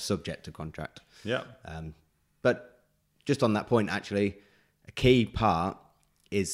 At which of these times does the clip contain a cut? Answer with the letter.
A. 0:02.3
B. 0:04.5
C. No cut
C